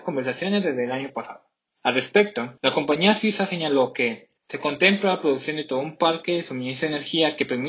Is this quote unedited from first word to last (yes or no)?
no